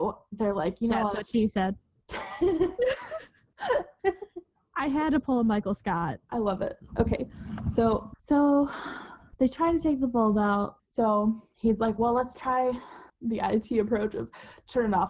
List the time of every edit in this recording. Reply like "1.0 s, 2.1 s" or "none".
10.8 s, 13.1 s